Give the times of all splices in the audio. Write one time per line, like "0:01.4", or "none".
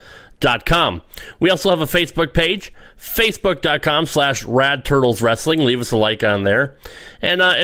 none